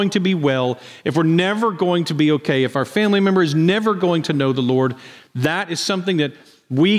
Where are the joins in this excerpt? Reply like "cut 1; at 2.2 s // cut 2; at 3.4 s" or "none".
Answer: none